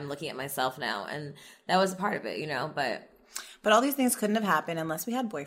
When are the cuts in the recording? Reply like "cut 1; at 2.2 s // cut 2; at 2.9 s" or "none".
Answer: none